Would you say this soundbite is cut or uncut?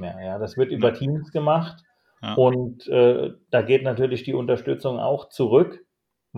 uncut